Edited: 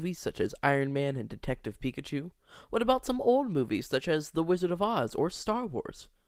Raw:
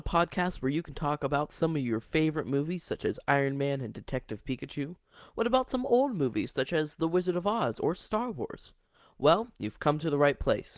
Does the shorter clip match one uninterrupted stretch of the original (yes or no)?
yes